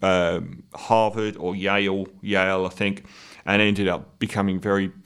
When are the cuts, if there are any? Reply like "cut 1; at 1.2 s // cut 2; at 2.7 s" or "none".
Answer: none